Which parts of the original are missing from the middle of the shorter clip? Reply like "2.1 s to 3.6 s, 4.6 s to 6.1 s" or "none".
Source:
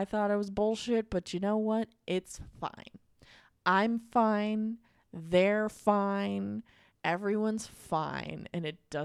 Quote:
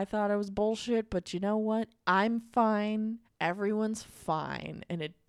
2.0 s to 3.6 s, 4.8 s to 6.9 s